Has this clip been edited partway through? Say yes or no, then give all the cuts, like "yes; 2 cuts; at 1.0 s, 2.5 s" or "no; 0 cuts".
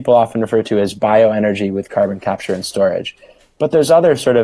no; 0 cuts